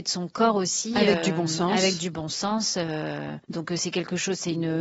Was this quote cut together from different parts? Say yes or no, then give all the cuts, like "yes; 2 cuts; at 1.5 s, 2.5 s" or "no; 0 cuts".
yes; 1 cut; at 3.4 s